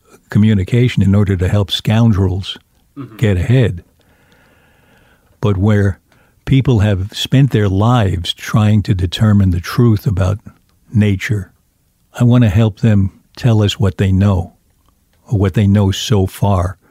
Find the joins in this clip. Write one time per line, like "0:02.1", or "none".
none